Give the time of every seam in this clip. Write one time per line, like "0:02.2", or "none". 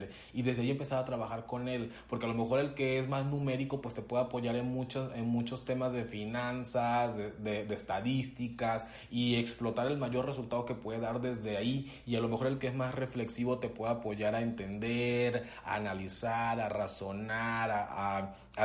none